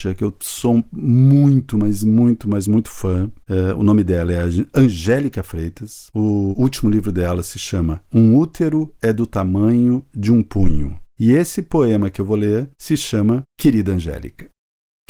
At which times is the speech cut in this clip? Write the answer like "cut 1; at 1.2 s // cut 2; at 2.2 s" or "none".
none